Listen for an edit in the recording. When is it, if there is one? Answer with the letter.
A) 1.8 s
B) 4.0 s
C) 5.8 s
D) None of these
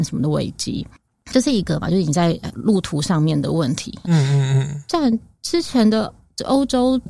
B